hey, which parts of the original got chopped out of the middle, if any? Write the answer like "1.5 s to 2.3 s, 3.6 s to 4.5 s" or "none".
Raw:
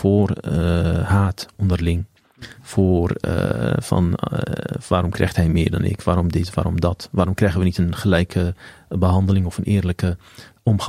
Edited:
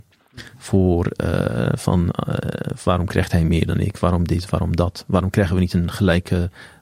none

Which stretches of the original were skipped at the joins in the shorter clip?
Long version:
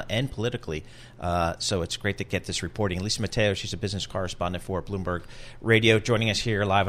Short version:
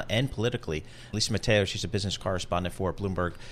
1.1 s to 3.0 s

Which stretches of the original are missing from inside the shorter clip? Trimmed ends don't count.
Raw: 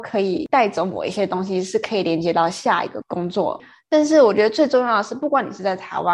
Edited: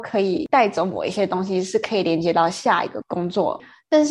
none

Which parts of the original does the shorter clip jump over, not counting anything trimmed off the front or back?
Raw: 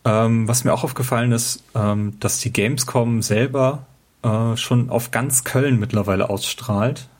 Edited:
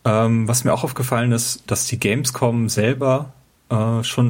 1.7 s to 2.2 s

